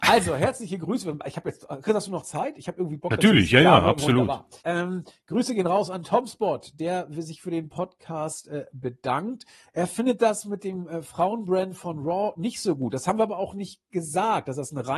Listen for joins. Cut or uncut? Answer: cut